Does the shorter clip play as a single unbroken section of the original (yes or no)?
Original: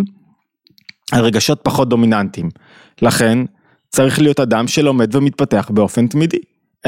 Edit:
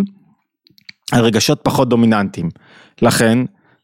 yes